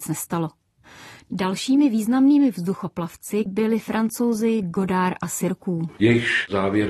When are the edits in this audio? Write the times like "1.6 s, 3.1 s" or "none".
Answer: 3.5 s, 6.0 s